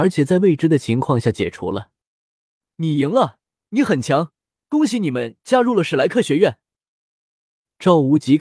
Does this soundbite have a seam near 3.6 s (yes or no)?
yes